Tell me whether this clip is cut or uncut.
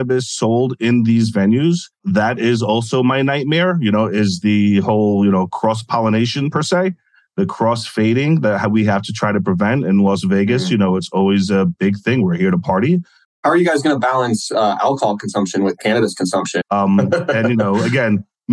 cut